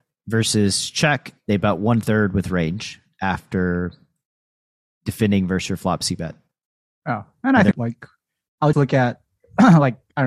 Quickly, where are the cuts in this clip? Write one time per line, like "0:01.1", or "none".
0:07.7
0:08.7